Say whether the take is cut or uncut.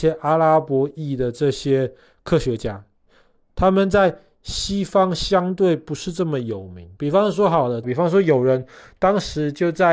cut